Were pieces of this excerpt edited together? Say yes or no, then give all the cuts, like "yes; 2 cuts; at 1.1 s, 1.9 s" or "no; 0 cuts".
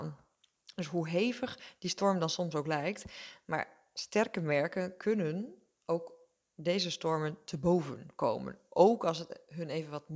no; 0 cuts